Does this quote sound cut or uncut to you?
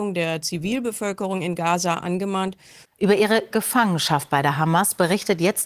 cut